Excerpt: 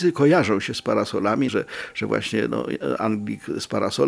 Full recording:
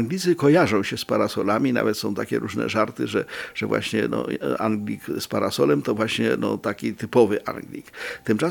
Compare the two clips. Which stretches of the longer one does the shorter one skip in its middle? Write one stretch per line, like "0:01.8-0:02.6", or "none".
0:01.7-0:03.1